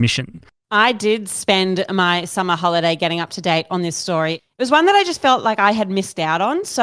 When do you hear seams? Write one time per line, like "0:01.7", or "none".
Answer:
none